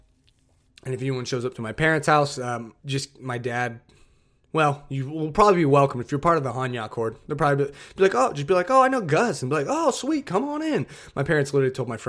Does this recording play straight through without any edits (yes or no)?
no